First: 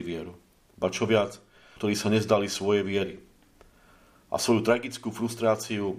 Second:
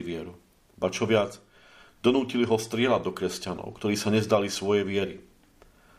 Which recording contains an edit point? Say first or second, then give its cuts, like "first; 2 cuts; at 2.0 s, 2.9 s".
first; 1 cut; at 1.8 s